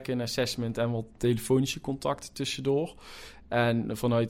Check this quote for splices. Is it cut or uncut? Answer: uncut